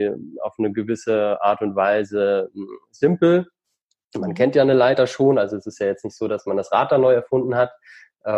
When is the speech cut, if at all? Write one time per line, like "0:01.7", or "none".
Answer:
none